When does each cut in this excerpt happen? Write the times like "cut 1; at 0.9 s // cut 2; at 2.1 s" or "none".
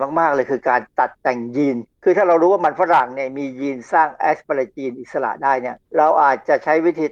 cut 1; at 1.9 s // cut 2; at 5.9 s